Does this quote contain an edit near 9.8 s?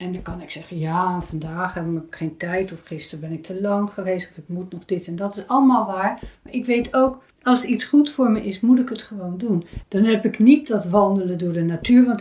yes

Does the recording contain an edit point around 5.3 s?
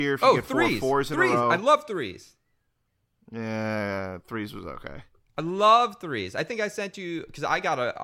no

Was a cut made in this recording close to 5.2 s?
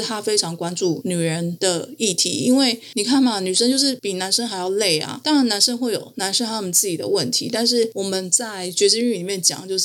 no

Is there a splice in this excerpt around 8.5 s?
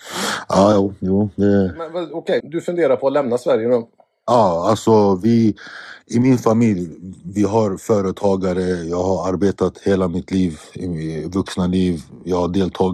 no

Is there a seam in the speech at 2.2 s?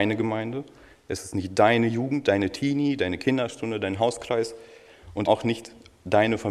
no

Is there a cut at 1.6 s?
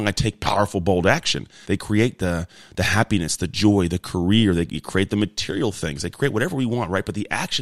yes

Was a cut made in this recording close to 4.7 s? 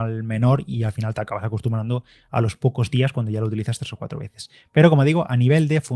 no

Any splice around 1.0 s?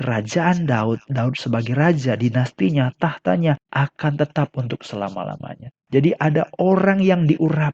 no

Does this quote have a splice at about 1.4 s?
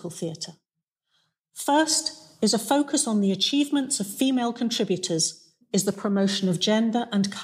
no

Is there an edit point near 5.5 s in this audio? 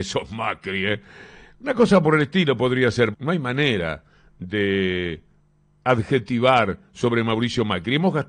no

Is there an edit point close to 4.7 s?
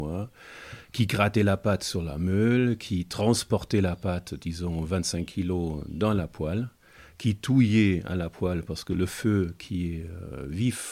no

